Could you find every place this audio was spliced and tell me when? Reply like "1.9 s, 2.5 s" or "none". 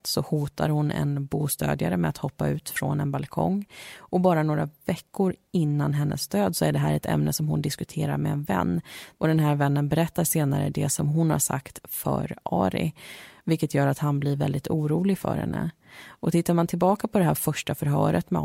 none